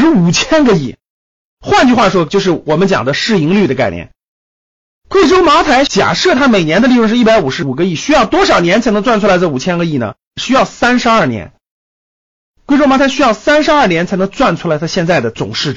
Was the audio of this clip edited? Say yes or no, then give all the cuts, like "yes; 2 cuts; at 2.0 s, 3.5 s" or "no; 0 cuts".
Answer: yes; 1 cut; at 1.4 s